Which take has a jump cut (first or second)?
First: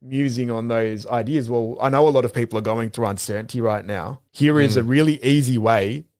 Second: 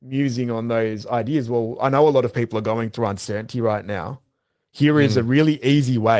first